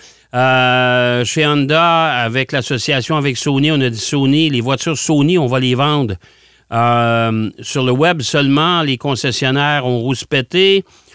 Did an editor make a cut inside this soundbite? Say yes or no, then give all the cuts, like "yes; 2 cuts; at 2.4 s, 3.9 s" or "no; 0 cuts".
no; 0 cuts